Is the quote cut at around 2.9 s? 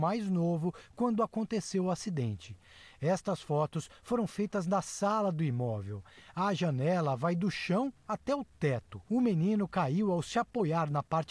no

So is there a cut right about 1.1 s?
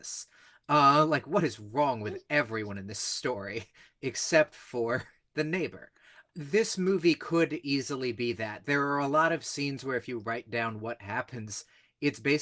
no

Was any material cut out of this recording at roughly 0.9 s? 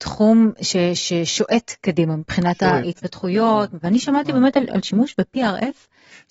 no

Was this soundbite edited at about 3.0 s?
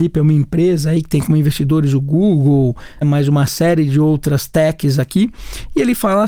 yes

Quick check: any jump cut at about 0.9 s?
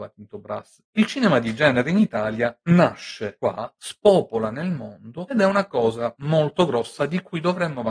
yes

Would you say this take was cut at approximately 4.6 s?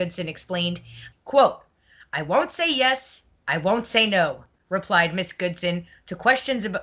no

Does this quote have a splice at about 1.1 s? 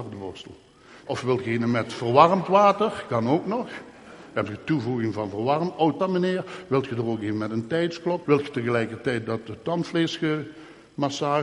yes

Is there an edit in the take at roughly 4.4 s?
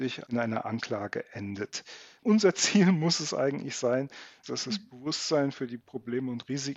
yes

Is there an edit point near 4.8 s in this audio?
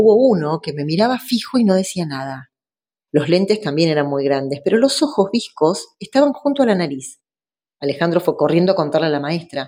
no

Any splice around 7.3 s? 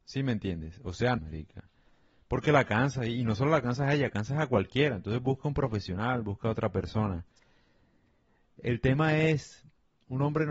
no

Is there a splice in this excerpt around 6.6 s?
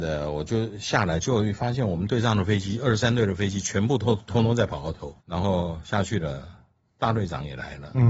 no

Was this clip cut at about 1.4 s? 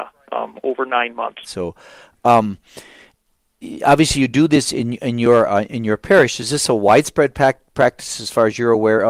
yes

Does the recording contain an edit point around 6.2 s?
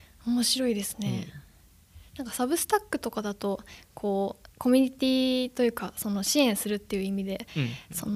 no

